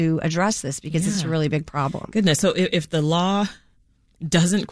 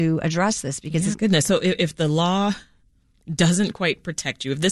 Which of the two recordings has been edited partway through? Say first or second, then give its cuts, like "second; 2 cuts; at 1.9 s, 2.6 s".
second; 1 cut; at 1.1 s